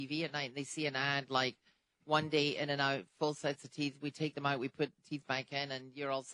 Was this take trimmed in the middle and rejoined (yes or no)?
no